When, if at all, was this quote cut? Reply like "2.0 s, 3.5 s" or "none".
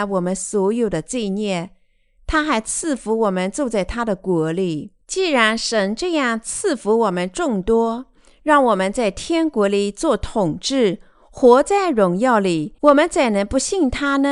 5.0 s, 12.8 s